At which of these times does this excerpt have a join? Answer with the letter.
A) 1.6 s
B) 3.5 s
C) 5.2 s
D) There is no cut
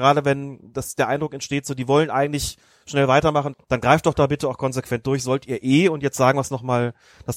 B